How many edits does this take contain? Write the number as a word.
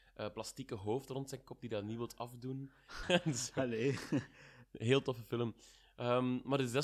one